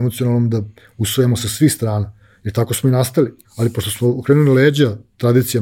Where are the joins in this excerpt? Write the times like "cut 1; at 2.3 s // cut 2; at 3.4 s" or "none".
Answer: cut 1; at 3.4 s